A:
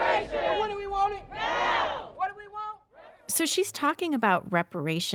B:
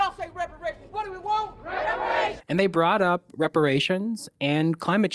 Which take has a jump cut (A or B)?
B